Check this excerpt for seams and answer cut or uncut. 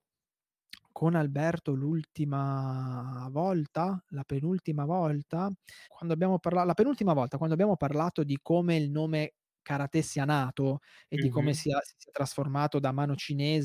cut